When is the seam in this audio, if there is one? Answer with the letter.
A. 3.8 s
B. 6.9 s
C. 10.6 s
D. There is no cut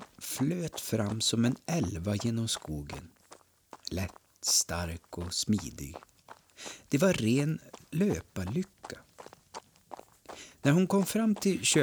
D